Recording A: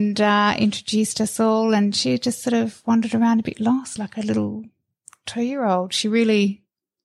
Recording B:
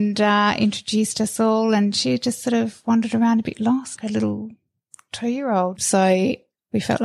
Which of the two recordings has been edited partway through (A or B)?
B